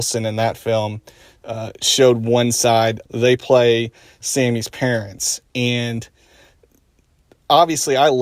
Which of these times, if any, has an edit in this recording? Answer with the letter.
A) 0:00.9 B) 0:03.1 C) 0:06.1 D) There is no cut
B